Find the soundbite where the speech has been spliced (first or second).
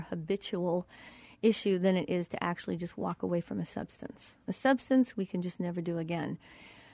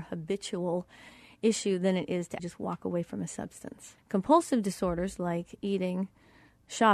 second